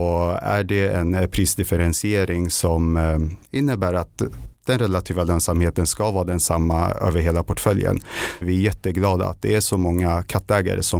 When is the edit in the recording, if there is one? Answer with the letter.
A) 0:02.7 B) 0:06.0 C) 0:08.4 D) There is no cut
C